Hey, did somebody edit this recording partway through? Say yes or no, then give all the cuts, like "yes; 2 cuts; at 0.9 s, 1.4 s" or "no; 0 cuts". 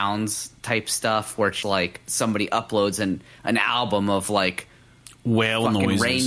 yes; 1 cut; at 1.6 s